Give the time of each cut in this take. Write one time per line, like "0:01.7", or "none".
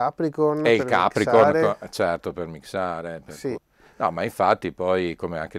0:03.6